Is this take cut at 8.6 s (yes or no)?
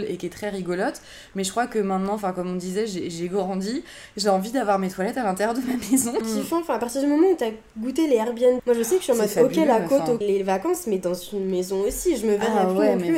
yes